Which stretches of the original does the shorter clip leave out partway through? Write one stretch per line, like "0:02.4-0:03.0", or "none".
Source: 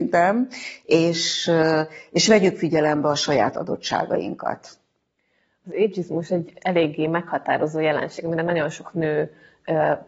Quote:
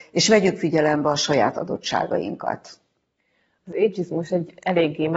none

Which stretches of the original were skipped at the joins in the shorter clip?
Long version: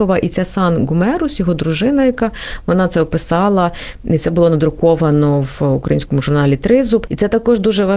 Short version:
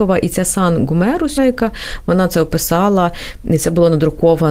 0:01.4-0:02.0

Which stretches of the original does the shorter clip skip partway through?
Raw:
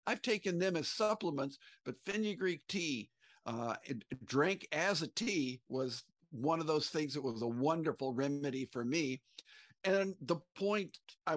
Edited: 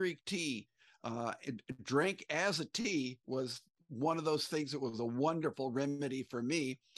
none

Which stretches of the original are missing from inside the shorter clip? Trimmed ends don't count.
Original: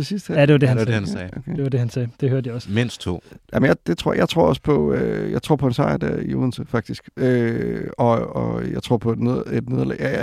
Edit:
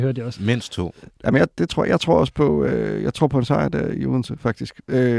none

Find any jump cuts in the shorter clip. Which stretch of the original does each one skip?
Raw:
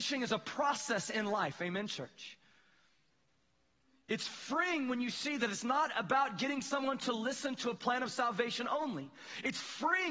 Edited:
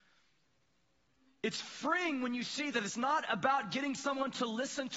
none

